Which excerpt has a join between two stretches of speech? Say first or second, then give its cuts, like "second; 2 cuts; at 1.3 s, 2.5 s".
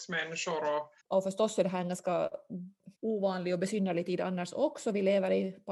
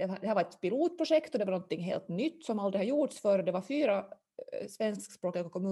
first; 2 cuts; at 1.0 s, 3.0 s